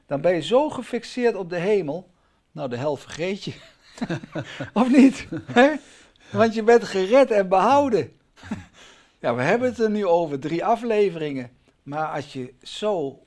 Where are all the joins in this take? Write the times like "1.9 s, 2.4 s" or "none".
none